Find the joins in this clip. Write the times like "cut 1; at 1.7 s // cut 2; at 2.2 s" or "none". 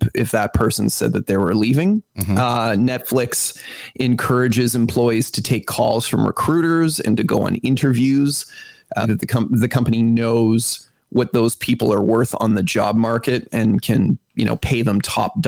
cut 1; at 2.1 s // cut 2; at 9.0 s

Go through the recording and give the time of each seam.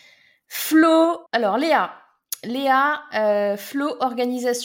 cut 1; at 1.3 s

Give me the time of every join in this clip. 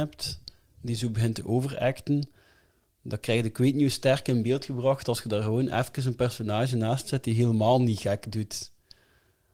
none

